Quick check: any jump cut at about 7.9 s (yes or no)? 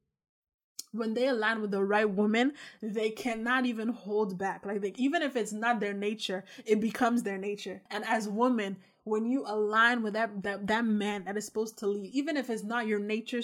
yes